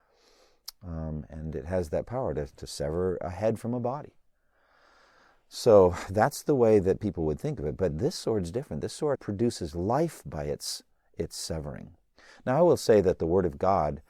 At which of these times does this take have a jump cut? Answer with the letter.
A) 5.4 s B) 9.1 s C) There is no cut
B